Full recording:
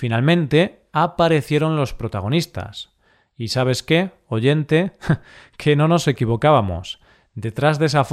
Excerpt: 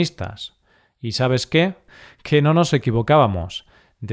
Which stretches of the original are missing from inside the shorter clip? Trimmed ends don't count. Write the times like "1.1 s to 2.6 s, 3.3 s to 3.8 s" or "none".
4.2 s to 5.2 s